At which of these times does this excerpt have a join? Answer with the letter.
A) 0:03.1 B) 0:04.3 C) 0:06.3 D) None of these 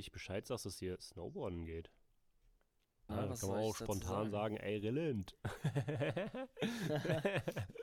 A